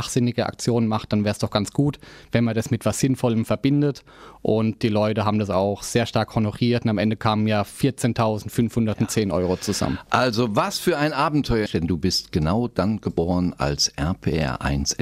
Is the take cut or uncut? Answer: cut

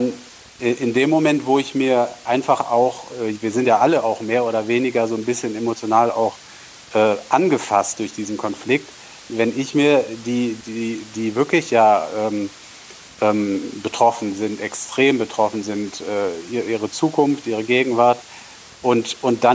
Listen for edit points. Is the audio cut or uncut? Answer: cut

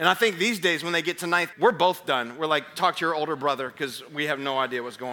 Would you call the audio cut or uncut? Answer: cut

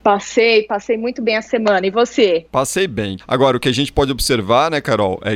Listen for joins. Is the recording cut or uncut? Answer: cut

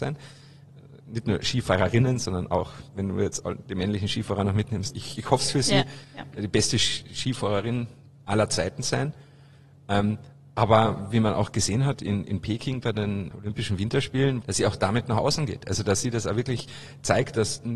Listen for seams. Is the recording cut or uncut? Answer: cut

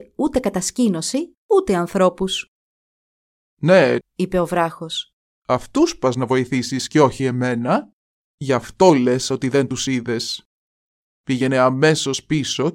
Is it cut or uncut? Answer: cut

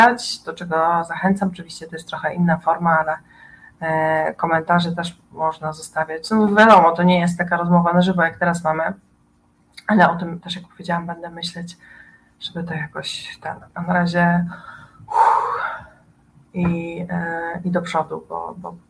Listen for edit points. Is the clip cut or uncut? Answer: uncut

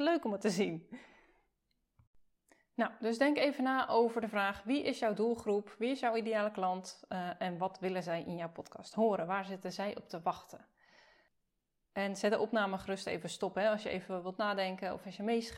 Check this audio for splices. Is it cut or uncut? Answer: uncut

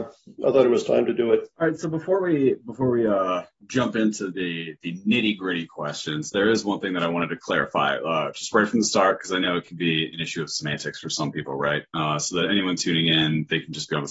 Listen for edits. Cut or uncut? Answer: cut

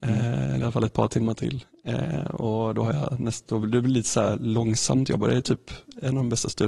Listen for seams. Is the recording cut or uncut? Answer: uncut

